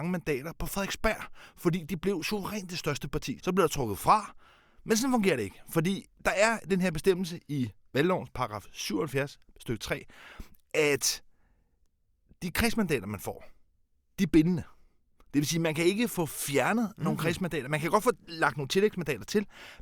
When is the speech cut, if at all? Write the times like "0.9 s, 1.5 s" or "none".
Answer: 3.4 s